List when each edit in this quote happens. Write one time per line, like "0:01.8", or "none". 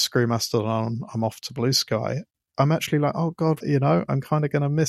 0:03.6